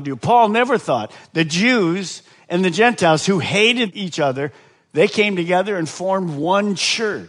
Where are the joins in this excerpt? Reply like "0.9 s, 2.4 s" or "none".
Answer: none